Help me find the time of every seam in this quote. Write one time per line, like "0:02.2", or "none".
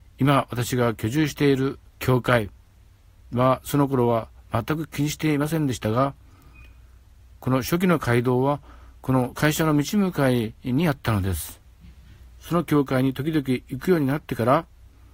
0:01.9
0:10.6